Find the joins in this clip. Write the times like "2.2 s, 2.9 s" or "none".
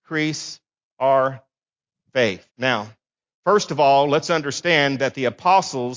2.5 s